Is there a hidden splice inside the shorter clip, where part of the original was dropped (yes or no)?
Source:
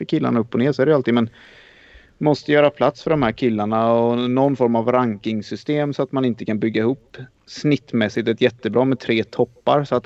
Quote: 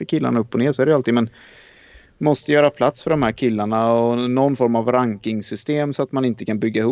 no